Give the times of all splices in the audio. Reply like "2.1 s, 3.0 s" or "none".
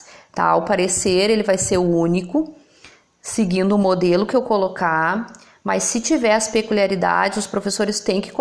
none